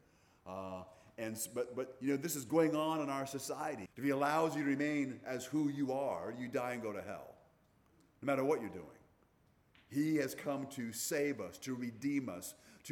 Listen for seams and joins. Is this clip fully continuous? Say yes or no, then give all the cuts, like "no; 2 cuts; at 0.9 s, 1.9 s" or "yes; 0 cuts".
no; 1 cut; at 3.9 s